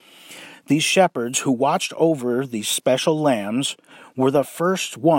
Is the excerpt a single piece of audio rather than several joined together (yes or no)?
yes